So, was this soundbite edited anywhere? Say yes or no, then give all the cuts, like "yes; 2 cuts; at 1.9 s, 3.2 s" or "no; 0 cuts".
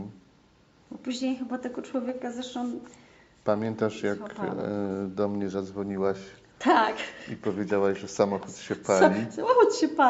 no; 0 cuts